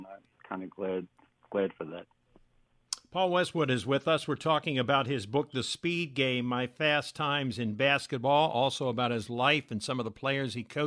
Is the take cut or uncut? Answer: uncut